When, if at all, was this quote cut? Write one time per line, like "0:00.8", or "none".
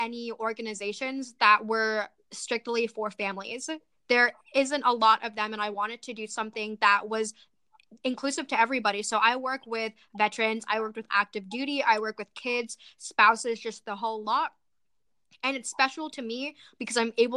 none